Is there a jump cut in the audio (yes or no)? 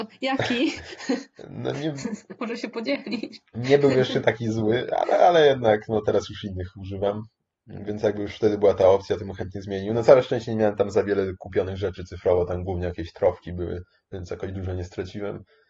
no